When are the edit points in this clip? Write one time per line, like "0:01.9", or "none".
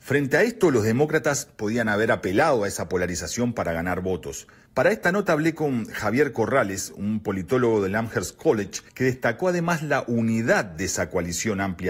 0:04.7
0:08.9